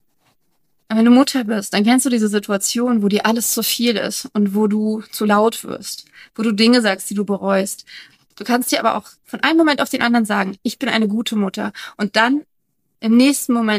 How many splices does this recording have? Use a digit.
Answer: 1